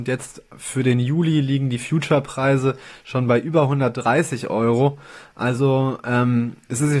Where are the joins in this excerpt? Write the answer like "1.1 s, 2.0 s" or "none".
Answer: none